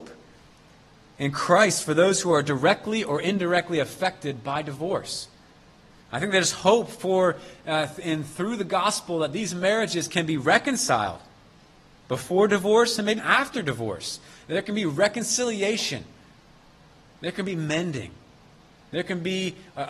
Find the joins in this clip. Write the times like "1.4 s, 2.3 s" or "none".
13.2 s